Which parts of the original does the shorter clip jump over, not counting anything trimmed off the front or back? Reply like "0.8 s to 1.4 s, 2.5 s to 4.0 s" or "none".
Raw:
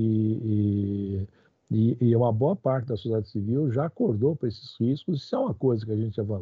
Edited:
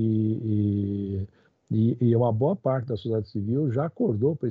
none